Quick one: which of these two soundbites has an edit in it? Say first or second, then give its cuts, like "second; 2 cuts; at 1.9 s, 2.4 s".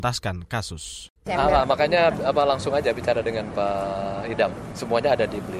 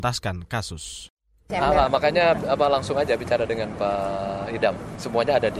first; 1 cut; at 1.2 s